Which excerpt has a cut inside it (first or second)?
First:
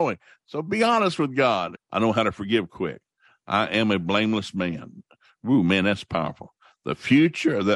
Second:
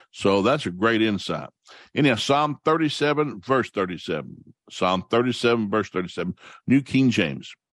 first